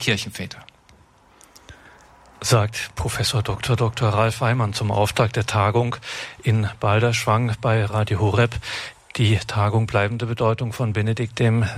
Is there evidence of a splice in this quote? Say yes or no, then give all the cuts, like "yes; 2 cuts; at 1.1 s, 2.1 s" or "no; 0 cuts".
no; 0 cuts